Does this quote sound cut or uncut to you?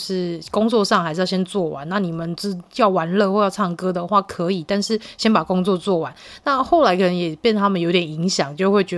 uncut